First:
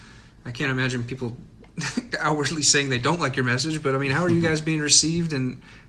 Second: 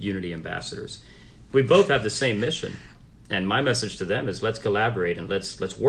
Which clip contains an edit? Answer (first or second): second